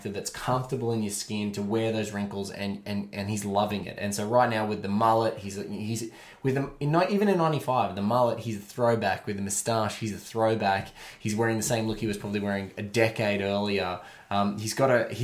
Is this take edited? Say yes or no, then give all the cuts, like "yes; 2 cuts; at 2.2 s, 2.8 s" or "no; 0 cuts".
no; 0 cuts